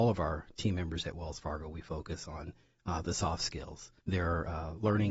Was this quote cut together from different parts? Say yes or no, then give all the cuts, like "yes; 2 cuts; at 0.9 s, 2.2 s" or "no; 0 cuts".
yes; 1 cut; at 4.0 s